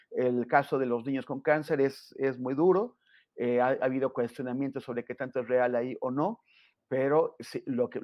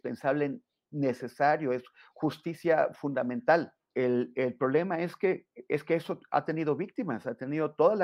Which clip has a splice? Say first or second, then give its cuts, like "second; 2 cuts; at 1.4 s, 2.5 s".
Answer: second; 1 cut; at 3.9 s